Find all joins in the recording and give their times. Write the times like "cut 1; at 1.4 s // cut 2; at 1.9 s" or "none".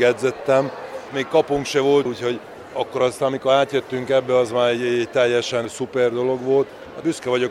cut 1; at 2.1 s